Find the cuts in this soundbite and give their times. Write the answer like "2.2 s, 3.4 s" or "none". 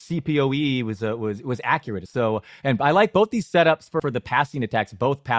2.1 s, 4.0 s